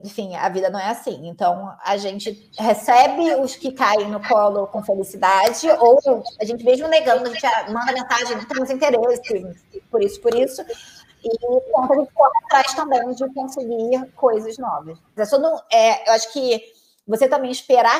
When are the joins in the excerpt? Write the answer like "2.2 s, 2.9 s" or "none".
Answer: 15.2 s